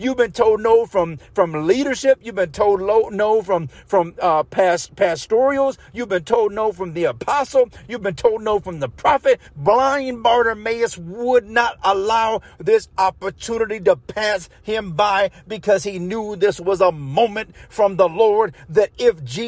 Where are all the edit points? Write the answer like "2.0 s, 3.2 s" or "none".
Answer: 7.8 s, 9.5 s